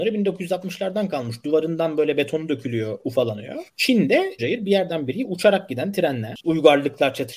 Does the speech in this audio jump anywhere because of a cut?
yes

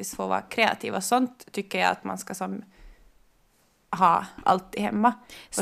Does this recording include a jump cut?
no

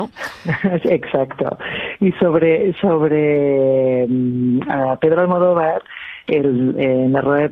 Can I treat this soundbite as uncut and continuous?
yes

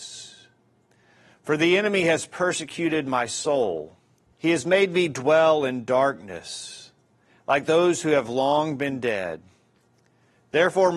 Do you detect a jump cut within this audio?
yes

